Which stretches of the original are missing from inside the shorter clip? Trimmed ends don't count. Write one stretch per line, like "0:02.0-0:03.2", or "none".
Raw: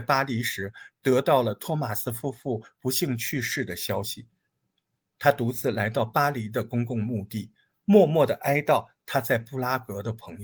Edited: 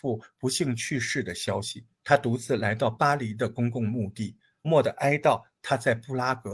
0:04.3-0:05.1
0:07.8-0:08.1